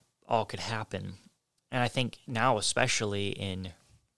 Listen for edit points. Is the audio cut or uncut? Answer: uncut